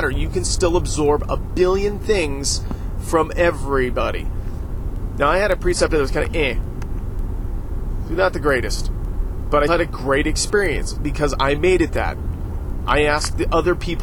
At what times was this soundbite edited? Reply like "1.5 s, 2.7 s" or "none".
9.7 s